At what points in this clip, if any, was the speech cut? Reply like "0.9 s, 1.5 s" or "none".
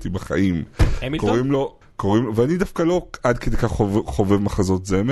1.8 s

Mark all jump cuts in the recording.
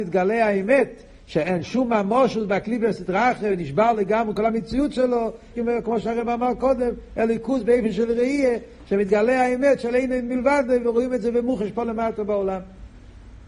5.5 s

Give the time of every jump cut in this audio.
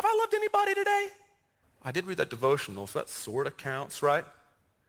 1.6 s

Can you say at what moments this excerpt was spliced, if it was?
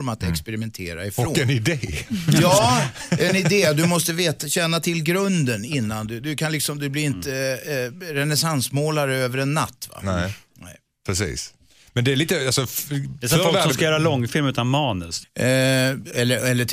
15.2 s

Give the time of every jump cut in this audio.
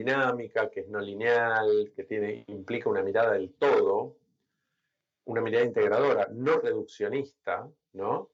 none

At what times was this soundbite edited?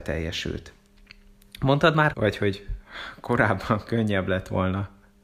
2.1 s

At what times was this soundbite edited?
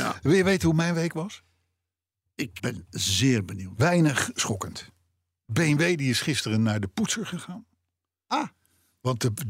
2.6 s

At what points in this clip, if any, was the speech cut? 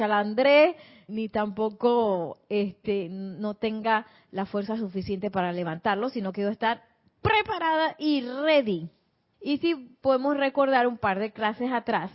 1.1 s, 9.3 s

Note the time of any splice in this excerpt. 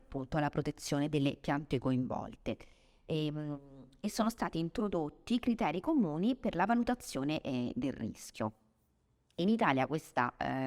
none

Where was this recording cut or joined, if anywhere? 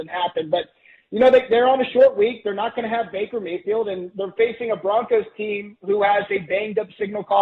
none

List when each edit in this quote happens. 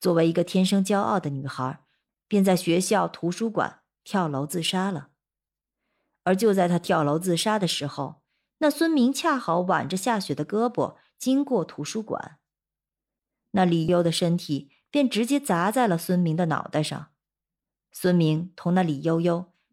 2.1 s, 13.9 s

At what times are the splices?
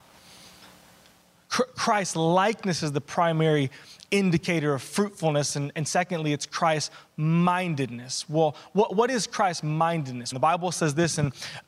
10.3 s

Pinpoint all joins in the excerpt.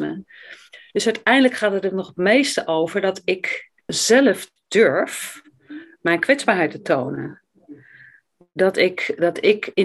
3.9 s

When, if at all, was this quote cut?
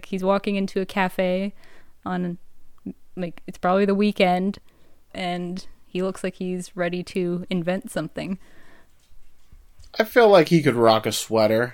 5.1 s

